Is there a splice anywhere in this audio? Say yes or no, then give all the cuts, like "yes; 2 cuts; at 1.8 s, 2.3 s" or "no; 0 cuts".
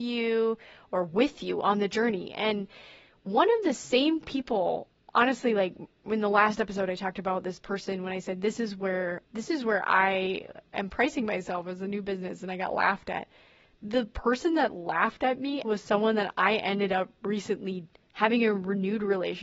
yes; 2 cuts; at 9.2 s, 15.6 s